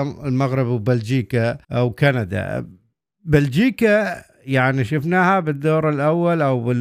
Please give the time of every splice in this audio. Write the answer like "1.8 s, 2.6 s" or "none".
1.6 s